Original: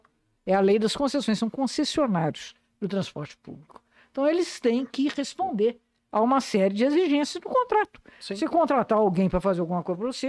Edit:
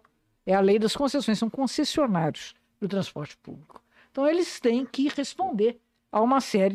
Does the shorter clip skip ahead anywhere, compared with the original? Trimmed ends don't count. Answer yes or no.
no